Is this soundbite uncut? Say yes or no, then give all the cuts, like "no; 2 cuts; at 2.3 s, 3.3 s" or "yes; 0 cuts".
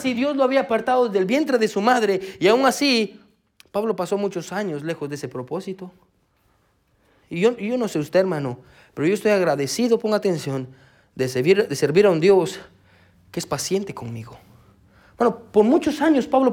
yes; 0 cuts